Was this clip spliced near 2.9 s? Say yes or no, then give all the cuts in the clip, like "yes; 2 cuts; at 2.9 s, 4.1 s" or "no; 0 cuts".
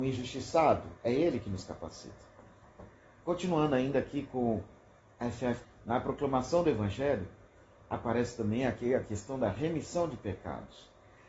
no; 2 cuts; at 1.0 s, 5.6 s